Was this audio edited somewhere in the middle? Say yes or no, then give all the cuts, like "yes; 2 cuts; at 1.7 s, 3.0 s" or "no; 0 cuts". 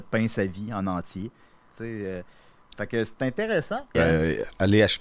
yes; 2 cuts; at 1.7 s, 3.9 s